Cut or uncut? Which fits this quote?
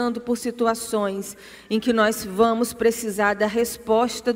uncut